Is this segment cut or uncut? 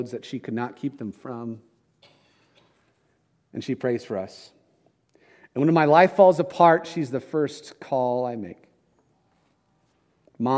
uncut